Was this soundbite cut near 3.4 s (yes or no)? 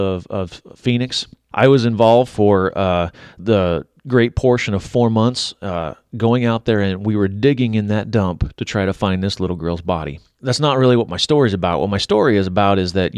yes